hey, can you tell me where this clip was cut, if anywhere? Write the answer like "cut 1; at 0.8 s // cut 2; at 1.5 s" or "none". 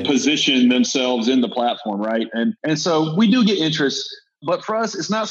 cut 1; at 2.6 s